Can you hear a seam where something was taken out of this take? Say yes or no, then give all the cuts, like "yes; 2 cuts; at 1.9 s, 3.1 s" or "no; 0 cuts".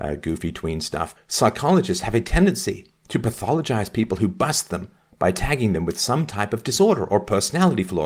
yes; 1 cut; at 1.2 s